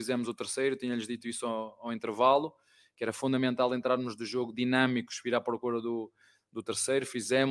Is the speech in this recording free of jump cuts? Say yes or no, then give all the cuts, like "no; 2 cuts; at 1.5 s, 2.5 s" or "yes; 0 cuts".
yes; 0 cuts